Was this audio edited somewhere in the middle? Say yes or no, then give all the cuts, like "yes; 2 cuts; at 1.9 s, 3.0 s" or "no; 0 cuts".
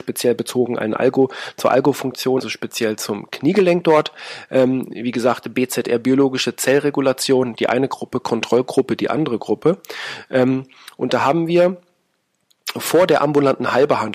yes; 1 cut; at 2.4 s